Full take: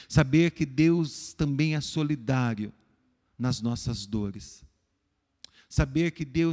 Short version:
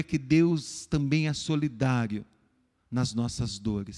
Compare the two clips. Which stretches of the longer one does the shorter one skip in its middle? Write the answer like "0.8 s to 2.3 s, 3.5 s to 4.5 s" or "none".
none